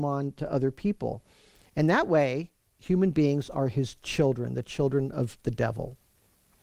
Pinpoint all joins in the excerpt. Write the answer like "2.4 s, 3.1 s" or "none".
none